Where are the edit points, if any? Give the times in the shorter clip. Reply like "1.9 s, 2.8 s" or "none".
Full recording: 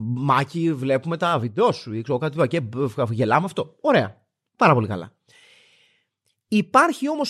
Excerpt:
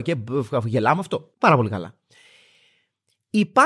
1.3 s